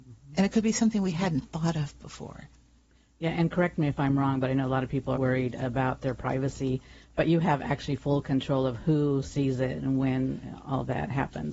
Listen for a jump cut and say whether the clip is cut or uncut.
cut